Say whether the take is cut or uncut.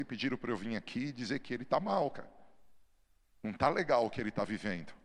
uncut